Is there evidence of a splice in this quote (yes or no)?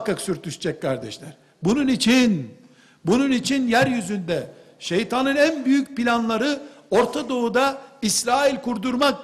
no